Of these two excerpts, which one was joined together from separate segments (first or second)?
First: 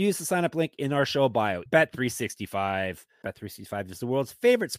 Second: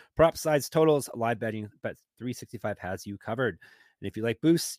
first